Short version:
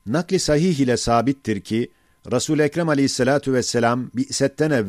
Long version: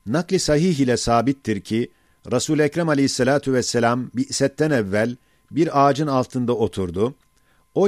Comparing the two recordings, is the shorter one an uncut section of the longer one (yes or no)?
yes